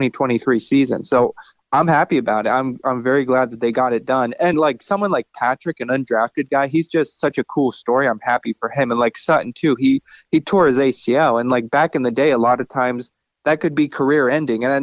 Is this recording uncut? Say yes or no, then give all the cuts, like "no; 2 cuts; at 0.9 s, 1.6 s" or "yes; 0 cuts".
yes; 0 cuts